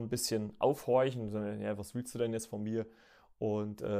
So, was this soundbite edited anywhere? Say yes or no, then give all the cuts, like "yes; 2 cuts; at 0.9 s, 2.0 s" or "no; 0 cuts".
no; 0 cuts